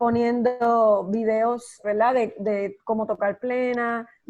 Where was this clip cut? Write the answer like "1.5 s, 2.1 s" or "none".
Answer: 1.8 s